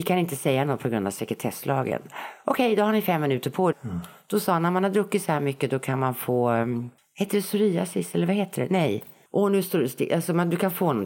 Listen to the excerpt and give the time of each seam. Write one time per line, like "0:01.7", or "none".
0:03.7